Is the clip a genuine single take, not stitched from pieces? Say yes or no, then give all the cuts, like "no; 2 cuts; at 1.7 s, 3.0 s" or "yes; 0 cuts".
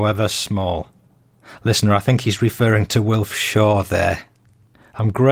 no; 1 cut; at 1.6 s